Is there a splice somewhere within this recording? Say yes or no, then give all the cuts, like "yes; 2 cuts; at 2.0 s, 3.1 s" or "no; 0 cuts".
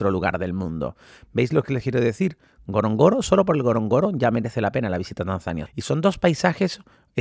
yes; 1 cut; at 5.7 s